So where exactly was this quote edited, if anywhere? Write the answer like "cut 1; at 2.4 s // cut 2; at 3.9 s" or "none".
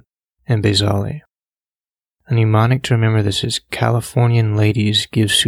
none